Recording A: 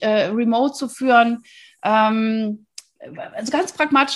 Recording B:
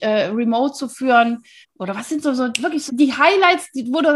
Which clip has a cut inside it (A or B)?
B